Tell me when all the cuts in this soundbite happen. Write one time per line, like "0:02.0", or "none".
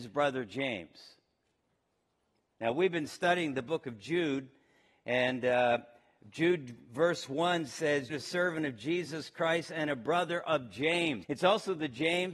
0:08.1
0:11.2